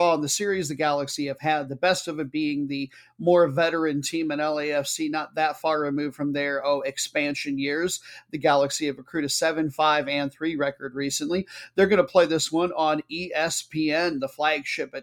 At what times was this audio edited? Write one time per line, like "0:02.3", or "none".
none